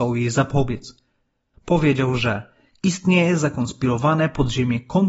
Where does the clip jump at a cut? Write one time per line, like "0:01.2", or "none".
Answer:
0:01.5